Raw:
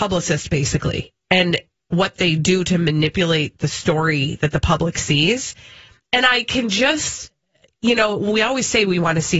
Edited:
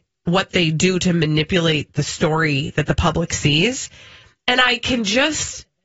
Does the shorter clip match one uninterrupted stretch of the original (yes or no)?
yes